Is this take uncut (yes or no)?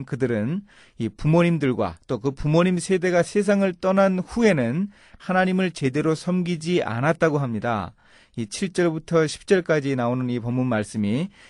yes